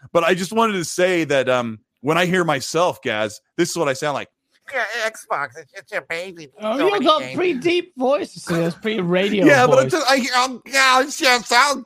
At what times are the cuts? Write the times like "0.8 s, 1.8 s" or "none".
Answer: none